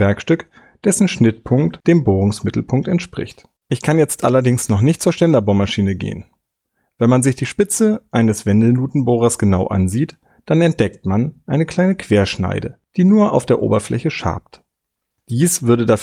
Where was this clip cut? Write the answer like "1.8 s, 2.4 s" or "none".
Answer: 3.6 s